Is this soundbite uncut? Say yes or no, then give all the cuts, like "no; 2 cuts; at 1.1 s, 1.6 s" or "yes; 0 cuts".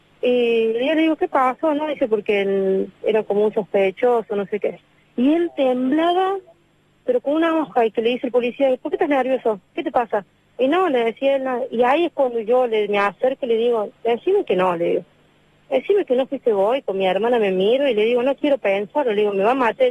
yes; 0 cuts